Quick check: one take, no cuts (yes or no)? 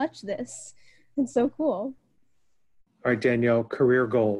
yes